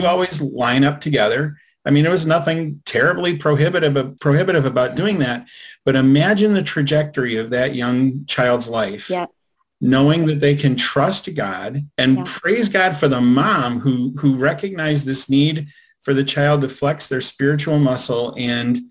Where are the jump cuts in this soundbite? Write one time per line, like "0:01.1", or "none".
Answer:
0:04.2
0:11.9